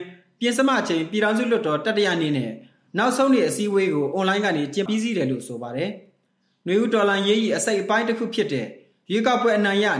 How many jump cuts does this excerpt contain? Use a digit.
1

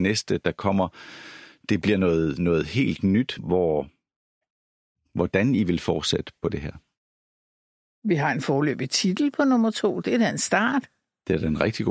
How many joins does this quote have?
1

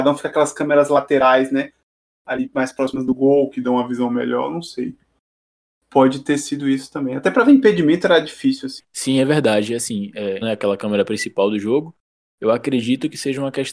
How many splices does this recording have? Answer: 2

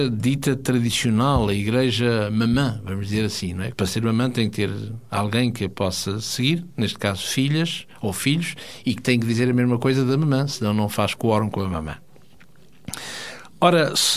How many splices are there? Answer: 1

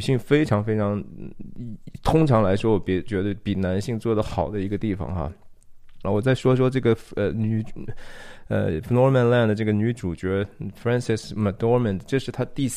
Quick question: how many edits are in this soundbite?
1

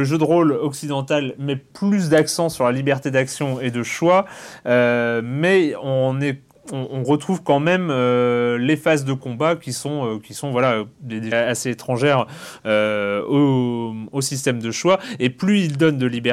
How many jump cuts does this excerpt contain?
1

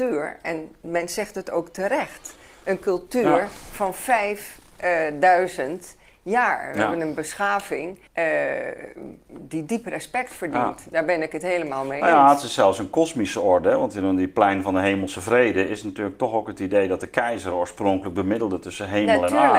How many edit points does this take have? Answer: 1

